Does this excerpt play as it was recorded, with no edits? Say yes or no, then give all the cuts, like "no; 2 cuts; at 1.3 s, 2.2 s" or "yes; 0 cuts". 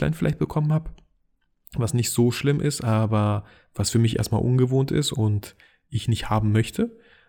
yes; 0 cuts